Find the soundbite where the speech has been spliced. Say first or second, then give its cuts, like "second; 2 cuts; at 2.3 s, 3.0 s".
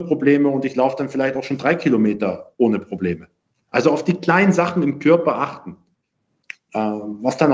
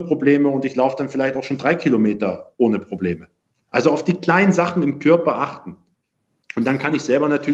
first; 1 cut; at 6.5 s